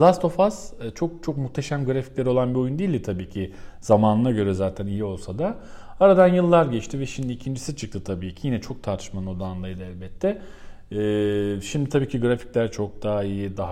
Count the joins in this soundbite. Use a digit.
0